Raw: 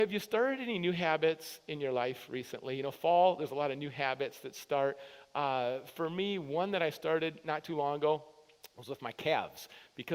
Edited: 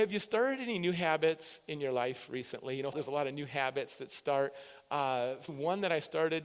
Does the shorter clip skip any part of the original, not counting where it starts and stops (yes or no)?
yes